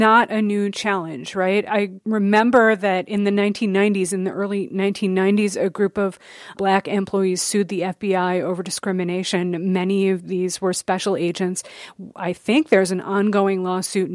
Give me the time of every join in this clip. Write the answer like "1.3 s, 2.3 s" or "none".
6.5 s